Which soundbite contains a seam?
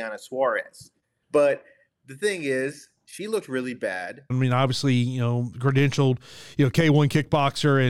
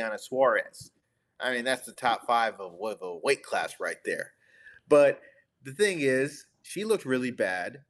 first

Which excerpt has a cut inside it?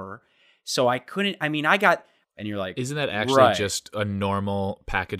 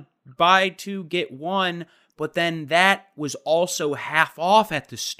first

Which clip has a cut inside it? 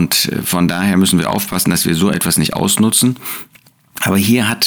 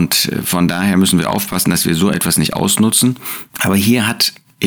second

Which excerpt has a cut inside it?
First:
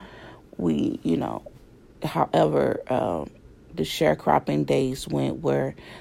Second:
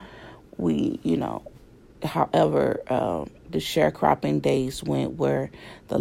second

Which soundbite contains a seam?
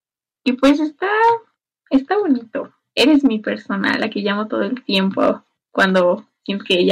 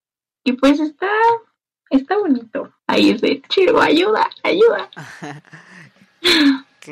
second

